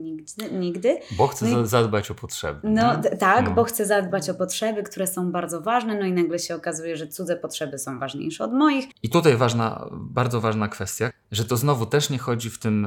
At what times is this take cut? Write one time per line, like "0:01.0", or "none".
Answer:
0:08.9
0:11.1